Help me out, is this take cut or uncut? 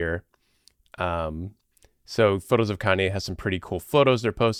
uncut